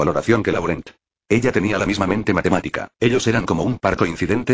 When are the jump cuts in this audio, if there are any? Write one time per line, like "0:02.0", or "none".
0:02.9